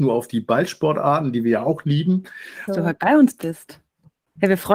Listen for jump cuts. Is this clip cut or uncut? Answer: cut